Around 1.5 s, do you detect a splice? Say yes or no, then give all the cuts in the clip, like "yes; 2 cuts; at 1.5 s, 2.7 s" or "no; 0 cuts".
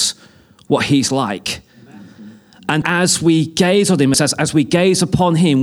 no; 2 cuts; at 2.8 s, 4.1 s